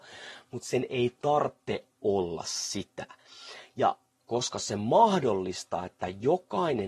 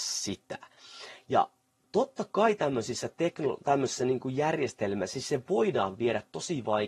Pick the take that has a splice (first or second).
first